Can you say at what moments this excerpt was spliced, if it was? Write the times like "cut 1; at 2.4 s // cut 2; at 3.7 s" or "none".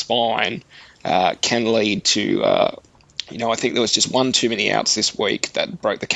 none